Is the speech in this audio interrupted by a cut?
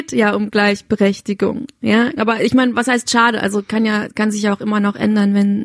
yes; 1 cut; at 2.2 s

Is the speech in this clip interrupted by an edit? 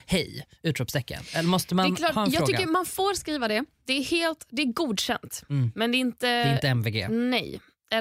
no; 0 cuts

